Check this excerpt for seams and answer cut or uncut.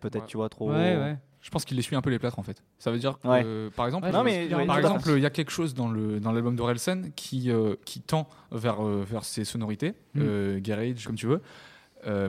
cut